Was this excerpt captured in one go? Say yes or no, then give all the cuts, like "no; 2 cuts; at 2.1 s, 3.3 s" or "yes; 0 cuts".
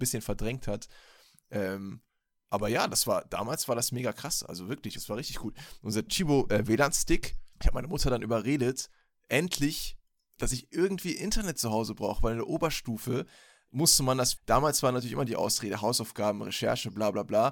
no; 3 cuts; at 5.0 s, 7.5 s, 14.4 s